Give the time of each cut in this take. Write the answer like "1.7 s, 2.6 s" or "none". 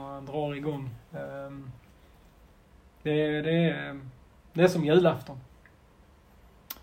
none

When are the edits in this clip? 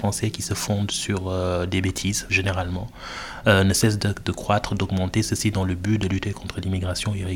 none

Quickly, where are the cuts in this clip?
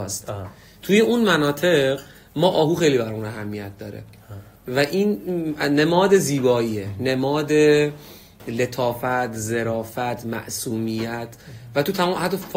none

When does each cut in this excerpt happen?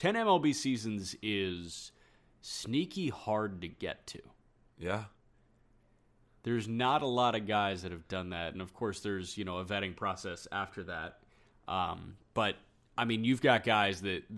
none

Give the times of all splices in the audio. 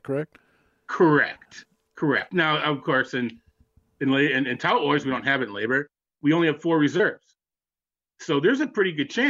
none

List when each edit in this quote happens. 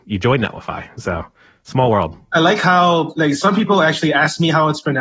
none

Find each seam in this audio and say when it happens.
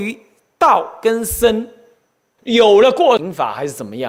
2.4 s

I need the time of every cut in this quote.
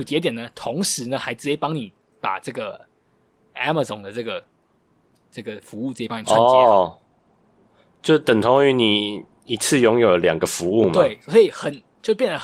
none

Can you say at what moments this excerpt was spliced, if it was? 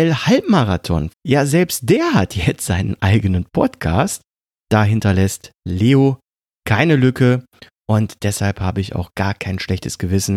1.1 s, 4.6 s

